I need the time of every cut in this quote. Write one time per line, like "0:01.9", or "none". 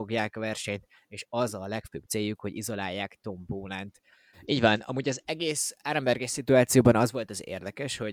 0:04.3